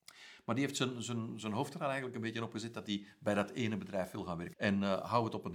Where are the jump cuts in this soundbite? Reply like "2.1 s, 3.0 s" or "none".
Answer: 4.5 s